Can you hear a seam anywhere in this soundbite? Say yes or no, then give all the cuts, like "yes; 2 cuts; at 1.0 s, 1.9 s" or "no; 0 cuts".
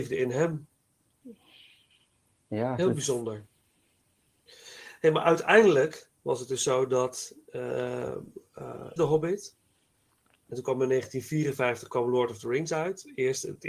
yes; 1 cut; at 9.0 s